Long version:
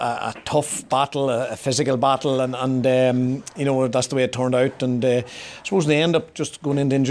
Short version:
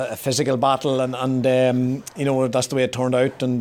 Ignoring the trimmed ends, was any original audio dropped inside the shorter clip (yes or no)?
no